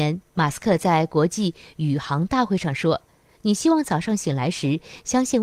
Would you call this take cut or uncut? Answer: uncut